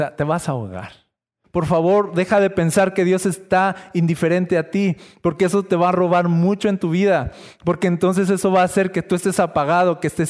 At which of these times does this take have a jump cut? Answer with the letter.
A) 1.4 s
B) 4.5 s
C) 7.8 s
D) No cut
A